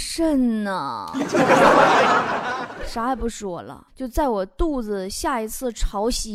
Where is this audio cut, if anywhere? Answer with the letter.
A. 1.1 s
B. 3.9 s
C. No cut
B